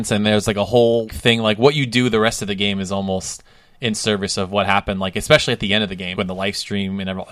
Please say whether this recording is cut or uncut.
cut